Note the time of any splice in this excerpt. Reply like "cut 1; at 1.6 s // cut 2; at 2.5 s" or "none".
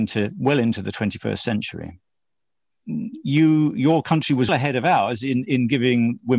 cut 1; at 2.8 s // cut 2; at 4.5 s